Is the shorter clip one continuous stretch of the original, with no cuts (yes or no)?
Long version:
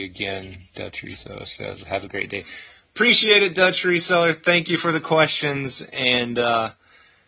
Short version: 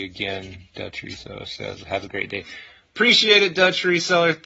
yes